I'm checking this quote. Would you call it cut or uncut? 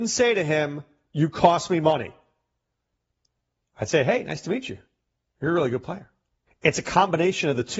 cut